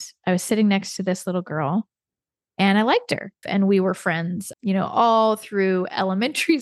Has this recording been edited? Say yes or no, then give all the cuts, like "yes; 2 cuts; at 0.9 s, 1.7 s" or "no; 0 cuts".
yes; 2 cuts; at 3.4 s, 4.5 s